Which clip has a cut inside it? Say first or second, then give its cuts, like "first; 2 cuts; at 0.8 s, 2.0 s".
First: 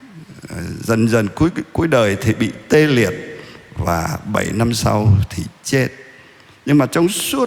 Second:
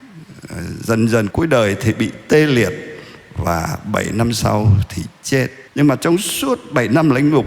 second; 2 cuts; at 1.3 s, 5.7 s